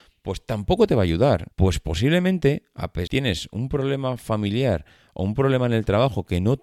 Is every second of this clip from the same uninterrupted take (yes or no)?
no